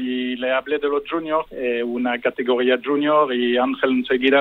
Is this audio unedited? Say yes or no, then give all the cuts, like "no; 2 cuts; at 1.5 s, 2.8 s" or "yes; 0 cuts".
no; 1 cut; at 1.5 s